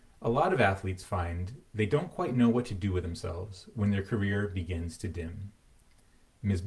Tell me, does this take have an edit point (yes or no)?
no